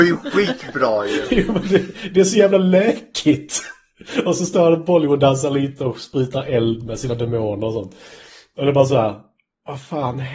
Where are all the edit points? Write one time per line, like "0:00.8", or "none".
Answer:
none

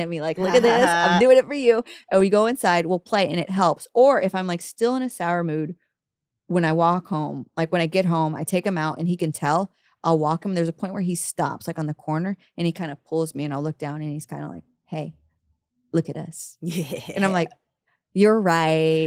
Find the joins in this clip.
none

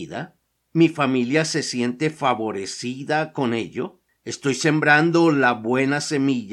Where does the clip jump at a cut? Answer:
0:04.1

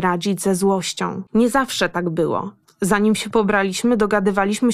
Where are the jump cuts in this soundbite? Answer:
0:01.3

